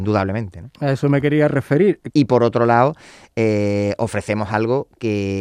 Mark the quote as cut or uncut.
cut